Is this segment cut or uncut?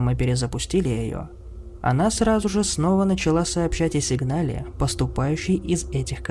uncut